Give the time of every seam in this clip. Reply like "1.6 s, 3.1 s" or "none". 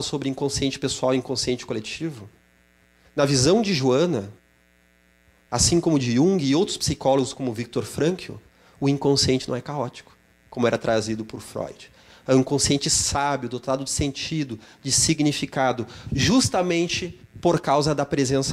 none